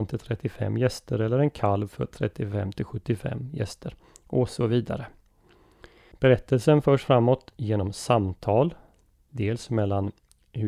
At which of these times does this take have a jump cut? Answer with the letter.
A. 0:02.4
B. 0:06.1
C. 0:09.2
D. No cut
B